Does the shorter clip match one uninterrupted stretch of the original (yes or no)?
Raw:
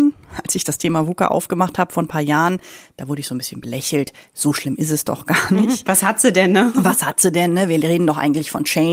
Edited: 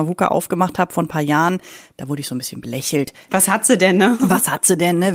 no